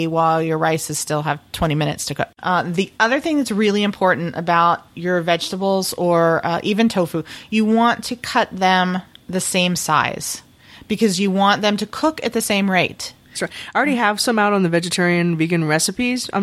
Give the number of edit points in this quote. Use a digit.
2